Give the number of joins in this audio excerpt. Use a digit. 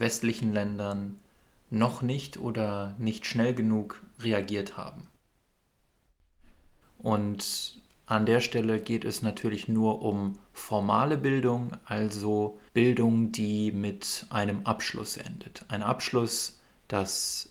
2